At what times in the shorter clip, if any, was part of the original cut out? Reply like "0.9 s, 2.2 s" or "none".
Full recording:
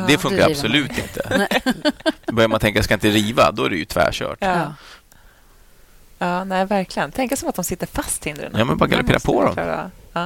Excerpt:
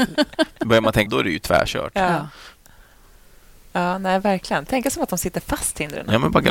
1.1 s